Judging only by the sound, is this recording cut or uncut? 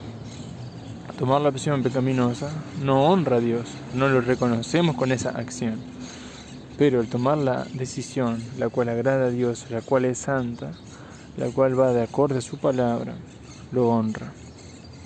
cut